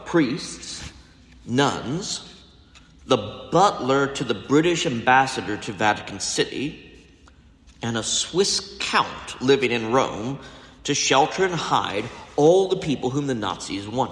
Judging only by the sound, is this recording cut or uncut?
cut